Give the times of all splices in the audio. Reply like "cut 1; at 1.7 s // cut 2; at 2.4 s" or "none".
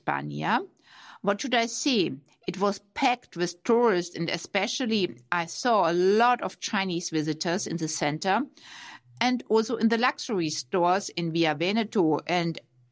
none